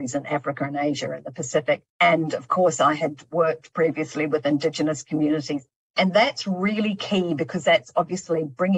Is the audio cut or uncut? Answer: cut